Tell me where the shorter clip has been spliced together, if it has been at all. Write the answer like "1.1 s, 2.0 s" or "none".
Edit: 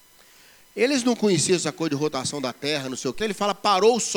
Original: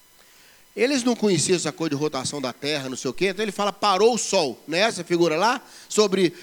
3.2 s